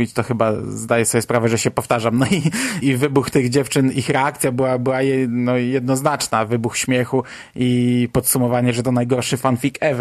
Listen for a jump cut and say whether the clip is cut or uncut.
cut